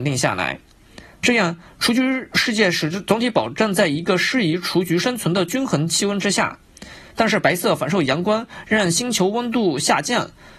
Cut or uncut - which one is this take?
cut